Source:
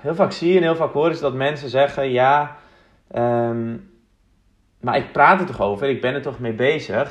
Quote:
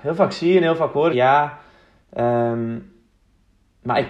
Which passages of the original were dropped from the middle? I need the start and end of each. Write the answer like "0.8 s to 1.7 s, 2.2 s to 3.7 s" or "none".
1.1 s to 2.1 s